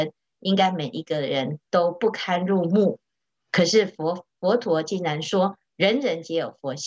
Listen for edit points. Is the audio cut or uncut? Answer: uncut